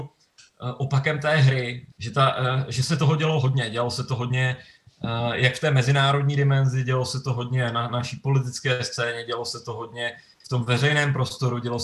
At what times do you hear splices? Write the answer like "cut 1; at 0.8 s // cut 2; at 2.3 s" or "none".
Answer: cut 1; at 1.9 s

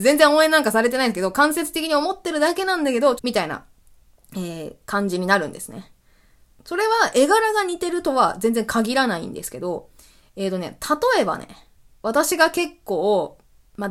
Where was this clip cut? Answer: cut 1; at 3.2 s

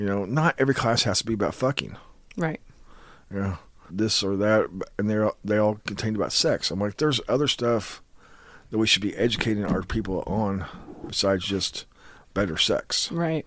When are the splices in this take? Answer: cut 1; at 3.9 s

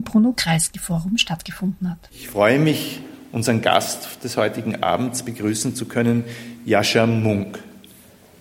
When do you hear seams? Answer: none

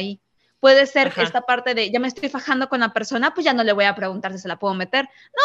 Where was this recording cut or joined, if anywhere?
none

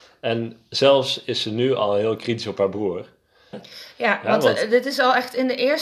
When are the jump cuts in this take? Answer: cut 1; at 3.5 s

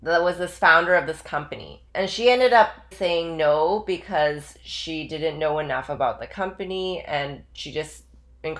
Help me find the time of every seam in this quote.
cut 1; at 1.9 s // cut 2; at 2.9 s

